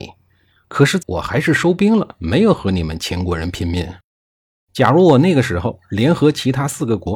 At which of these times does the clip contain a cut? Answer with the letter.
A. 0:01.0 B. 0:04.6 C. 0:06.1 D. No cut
A